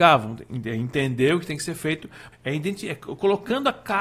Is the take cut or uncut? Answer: cut